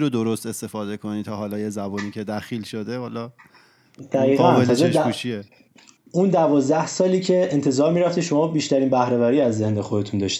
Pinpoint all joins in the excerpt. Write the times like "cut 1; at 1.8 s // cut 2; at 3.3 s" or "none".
none